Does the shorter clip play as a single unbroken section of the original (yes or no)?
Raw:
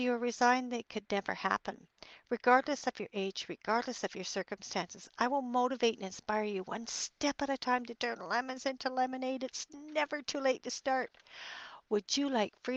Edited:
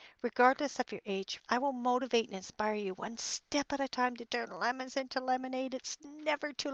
no